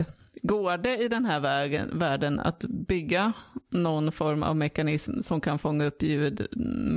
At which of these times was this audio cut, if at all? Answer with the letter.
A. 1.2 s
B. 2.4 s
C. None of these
C